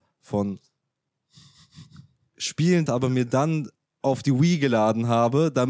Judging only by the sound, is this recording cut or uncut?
cut